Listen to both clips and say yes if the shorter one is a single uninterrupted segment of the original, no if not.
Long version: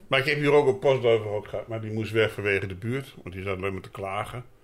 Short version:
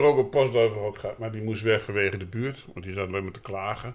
yes